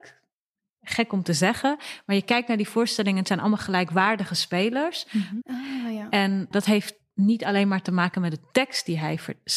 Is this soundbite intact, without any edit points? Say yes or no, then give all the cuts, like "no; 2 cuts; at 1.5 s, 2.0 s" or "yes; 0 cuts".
no; 2 cuts; at 5.4 s, 6.5 s